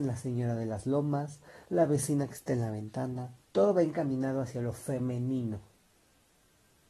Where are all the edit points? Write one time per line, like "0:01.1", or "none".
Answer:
0:01.6
0:03.4